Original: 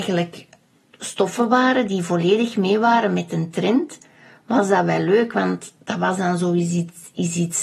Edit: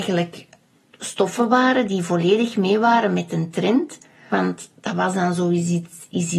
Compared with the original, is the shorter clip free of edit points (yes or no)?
no